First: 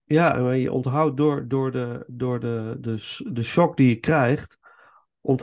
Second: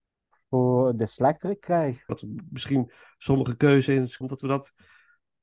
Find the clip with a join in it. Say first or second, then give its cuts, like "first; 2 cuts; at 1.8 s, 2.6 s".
second; 2 cuts; at 2.1 s, 4.2 s